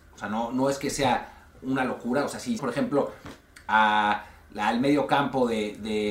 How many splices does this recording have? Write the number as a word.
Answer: one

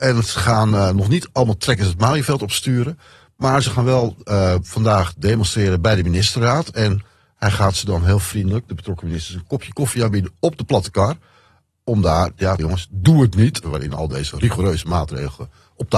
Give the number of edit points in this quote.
two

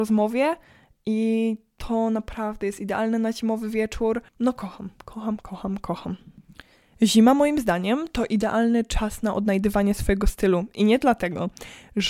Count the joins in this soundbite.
one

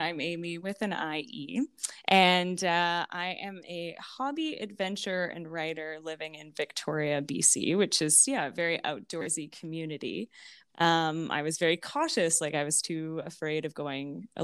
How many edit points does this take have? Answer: one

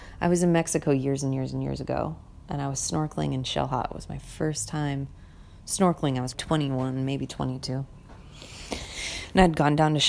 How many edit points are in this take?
one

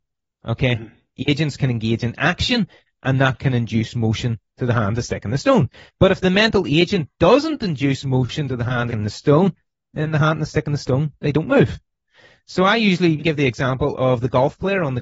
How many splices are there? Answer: two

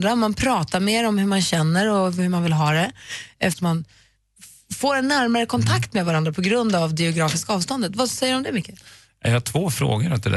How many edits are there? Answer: one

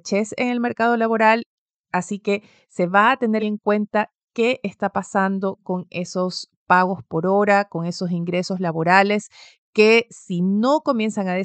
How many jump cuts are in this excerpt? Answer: one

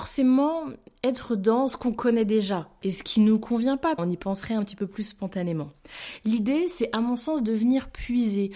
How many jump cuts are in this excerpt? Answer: one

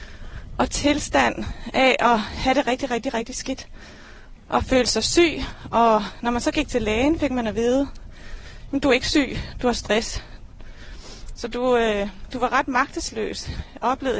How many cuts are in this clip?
zero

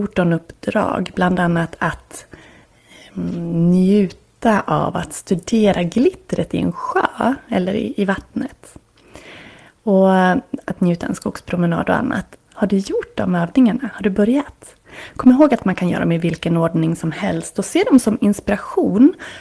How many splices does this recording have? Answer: one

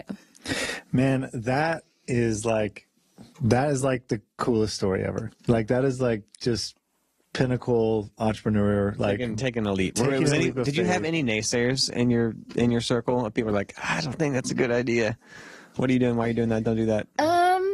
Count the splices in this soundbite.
zero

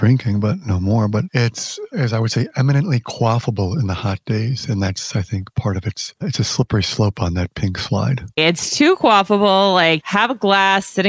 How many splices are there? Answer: one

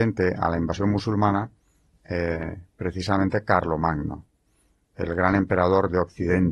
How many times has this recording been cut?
zero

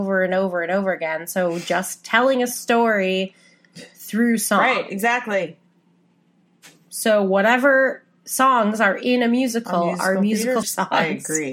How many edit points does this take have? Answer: one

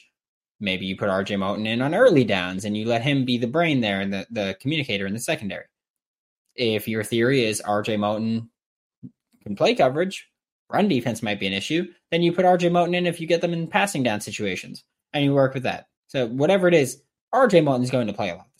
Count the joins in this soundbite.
one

